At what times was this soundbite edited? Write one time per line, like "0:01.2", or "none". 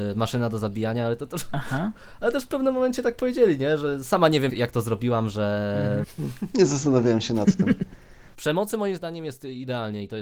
0:04.5
0:06.0
0:08.3